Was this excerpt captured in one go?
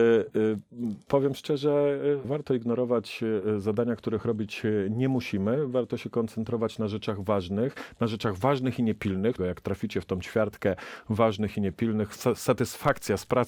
no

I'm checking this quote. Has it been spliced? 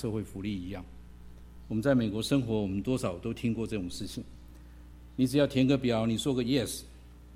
no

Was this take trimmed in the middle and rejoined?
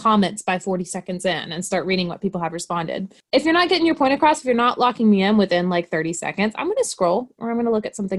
no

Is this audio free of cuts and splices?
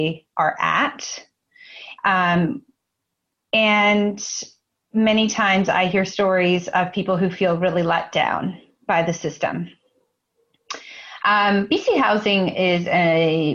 no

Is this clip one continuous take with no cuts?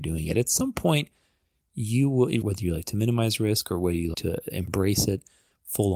no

